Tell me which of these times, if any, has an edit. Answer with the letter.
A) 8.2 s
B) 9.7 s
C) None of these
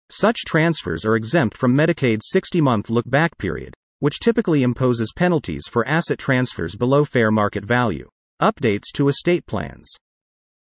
A